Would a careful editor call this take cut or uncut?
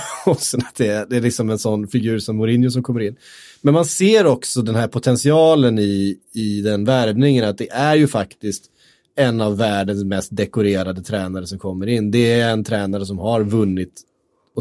uncut